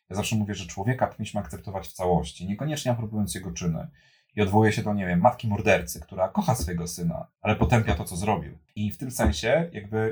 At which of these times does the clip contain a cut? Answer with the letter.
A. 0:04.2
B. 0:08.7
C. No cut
B